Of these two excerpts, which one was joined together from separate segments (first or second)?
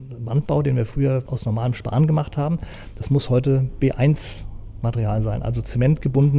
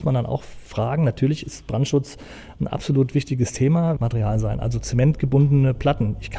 second